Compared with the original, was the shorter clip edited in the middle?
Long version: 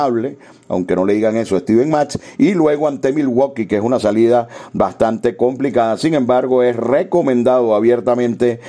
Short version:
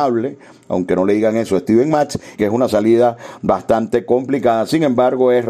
yes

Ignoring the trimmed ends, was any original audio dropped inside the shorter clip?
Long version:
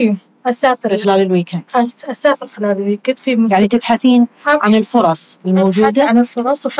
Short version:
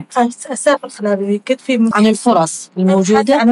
yes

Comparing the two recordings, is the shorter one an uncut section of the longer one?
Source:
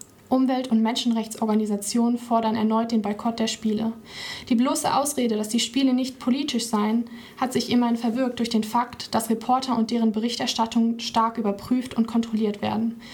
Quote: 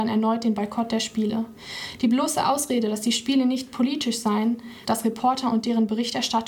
no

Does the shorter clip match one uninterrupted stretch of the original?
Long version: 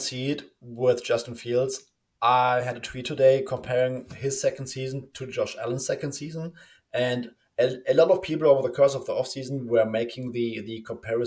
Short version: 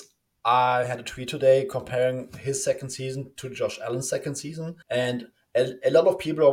no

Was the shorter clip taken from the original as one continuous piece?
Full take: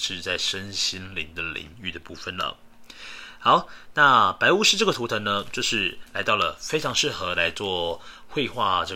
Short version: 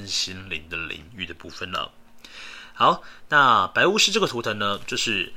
yes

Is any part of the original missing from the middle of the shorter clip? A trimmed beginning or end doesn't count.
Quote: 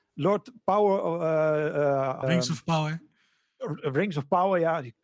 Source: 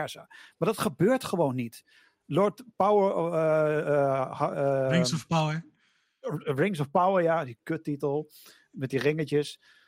yes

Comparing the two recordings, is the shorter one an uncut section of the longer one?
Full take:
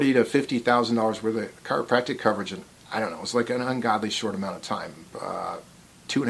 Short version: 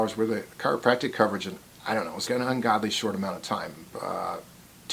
no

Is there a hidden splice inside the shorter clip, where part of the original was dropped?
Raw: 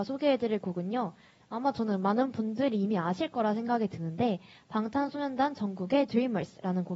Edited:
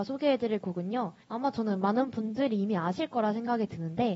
yes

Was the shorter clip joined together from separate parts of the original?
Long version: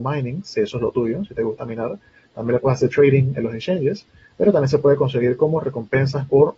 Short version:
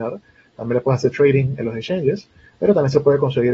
no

